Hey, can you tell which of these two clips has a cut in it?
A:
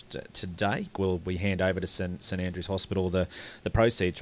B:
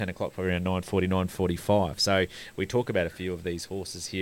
A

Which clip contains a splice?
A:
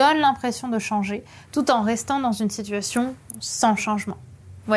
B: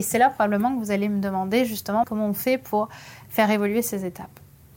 B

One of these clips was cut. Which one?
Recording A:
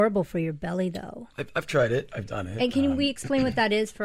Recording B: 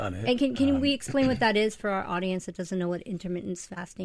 A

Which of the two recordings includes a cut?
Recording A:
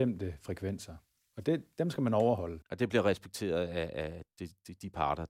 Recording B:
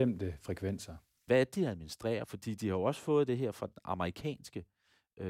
B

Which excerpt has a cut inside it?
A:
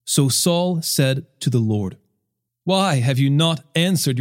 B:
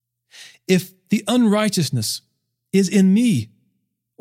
A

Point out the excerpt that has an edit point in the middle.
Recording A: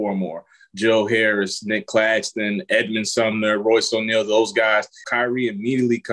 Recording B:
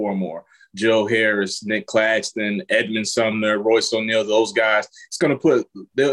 A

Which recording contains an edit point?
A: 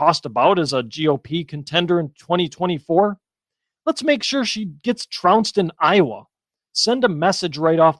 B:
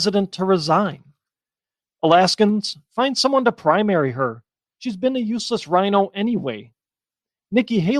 B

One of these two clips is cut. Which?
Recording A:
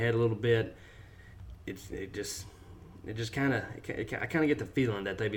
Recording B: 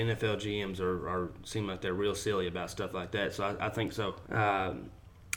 B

